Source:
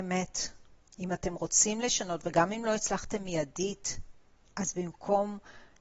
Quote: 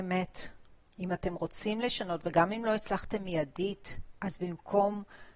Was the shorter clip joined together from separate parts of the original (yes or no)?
yes